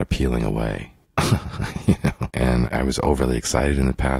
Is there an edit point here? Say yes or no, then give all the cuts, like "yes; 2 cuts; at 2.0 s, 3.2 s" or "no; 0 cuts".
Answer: yes; 2 cuts; at 1.0 s, 2.3 s